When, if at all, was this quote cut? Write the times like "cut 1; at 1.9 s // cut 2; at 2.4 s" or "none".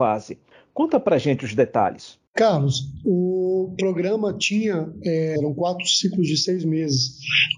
cut 1; at 2.3 s // cut 2; at 5.4 s